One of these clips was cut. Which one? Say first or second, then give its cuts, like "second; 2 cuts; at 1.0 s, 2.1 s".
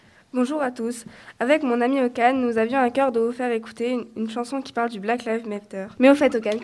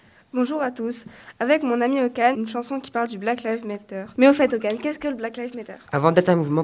second; 1 cut; at 2.3 s